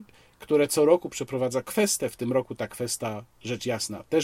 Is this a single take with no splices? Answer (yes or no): yes